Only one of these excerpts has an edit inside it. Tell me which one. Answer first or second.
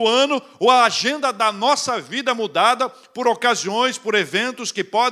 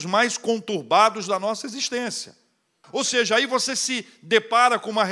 second